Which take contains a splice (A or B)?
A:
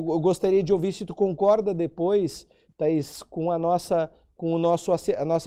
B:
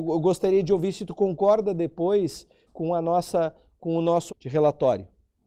B